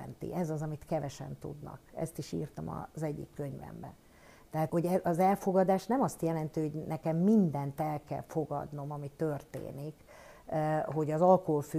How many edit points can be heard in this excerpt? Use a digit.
1